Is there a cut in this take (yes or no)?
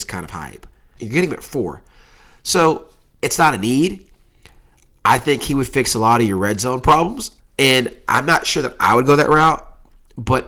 yes